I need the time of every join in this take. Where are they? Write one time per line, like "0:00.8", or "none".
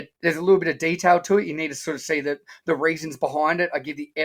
none